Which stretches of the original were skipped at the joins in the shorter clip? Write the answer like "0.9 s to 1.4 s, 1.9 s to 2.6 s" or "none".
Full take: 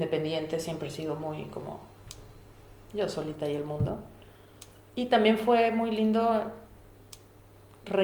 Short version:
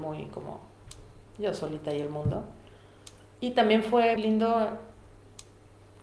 2.5 s to 2.8 s, 5.7 s to 5.9 s